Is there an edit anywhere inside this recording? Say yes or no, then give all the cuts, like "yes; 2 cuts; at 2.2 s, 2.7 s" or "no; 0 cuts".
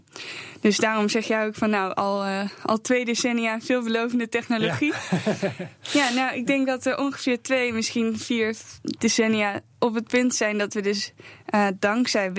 no; 0 cuts